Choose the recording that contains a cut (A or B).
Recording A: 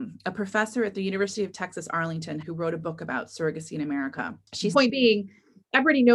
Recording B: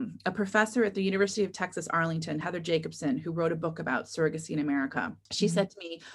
A